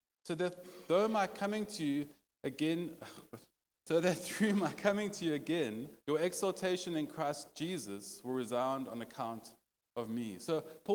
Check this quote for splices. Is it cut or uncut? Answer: cut